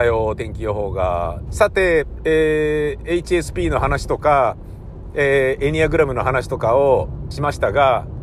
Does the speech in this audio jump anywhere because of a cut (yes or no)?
yes